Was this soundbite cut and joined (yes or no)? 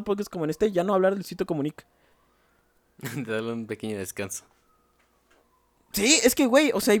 no